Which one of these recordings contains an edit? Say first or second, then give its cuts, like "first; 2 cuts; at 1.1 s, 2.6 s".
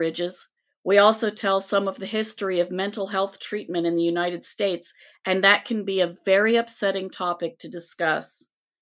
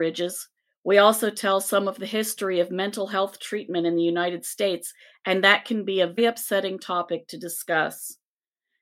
second; 1 cut; at 6.2 s